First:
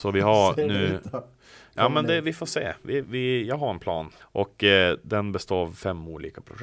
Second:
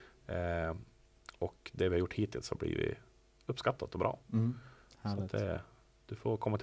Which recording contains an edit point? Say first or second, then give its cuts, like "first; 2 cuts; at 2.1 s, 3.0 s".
first; 2 cuts; at 3.0 s, 4.2 s